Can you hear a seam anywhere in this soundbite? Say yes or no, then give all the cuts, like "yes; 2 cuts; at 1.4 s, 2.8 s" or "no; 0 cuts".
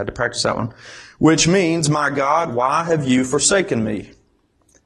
yes; 1 cut; at 2.5 s